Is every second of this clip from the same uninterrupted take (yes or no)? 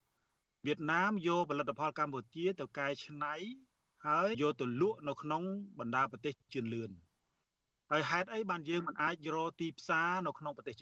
no